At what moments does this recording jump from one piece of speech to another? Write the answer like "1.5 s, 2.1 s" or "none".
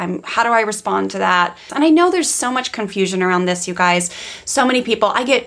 1.7 s